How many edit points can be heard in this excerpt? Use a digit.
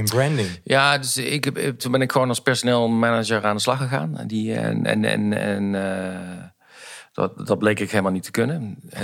1